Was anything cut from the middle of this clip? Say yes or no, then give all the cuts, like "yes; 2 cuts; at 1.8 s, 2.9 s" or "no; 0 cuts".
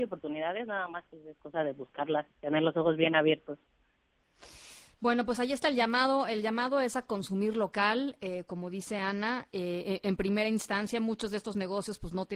yes; 1 cut; at 2.3 s